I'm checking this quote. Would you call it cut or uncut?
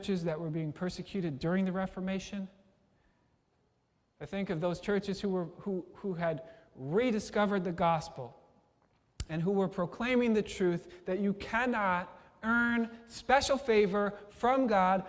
uncut